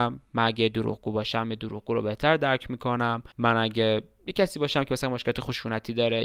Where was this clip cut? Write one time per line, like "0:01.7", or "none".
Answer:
0:03.3